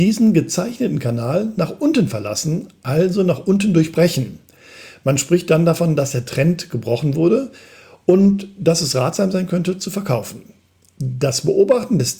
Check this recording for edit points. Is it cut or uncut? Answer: uncut